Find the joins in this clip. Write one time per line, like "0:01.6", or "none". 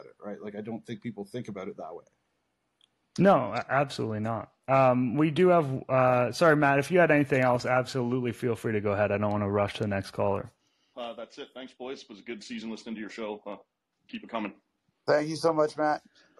0:10.9

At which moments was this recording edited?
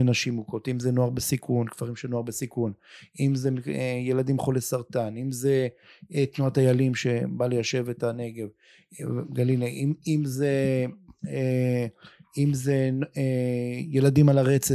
none

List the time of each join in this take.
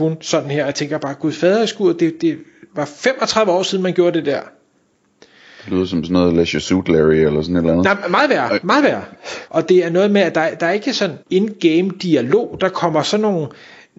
0:09.5
0:11.2

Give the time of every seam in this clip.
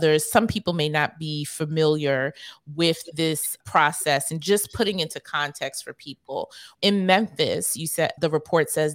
0:06.7

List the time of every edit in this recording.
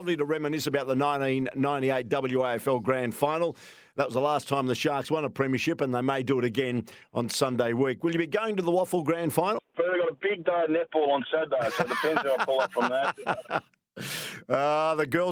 0:09.7

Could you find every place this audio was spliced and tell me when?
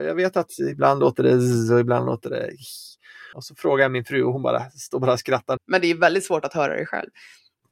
0:03.3
0:05.6

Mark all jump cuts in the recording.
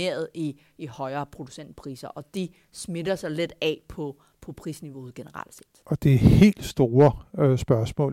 none

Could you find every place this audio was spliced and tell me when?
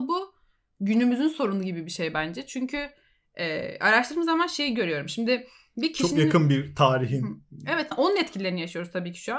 0:07.9

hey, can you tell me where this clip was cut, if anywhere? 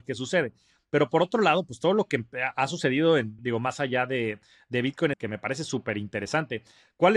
0:03.4
0:05.1

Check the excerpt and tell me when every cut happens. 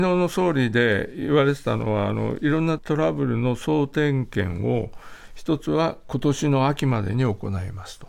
0:02.8

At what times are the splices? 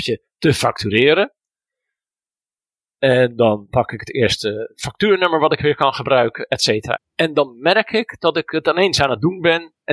0:07.0

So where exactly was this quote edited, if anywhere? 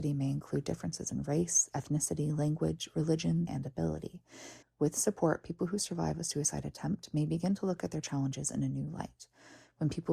0:03.5
0:04.6

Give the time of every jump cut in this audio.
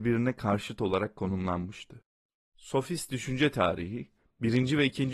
none

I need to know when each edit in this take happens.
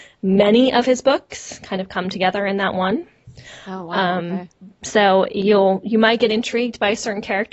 none

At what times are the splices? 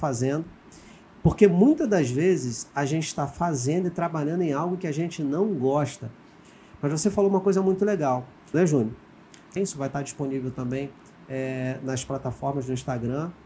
0:08.5
0:09.6

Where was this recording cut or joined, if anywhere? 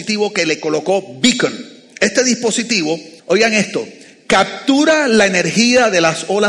0:03.2

